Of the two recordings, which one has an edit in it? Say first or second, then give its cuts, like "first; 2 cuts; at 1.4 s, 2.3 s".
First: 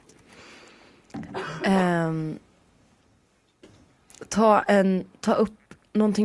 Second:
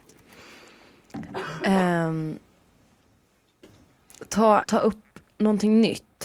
second; 1 cut; at 4.6 s